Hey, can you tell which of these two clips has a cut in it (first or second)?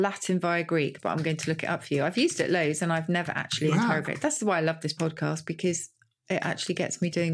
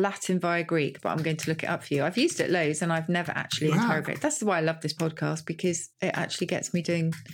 second